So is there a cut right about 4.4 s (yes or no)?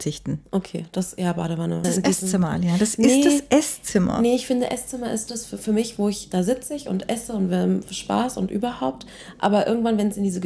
no